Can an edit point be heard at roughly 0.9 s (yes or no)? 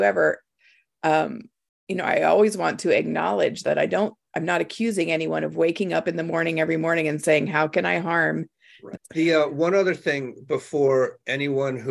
no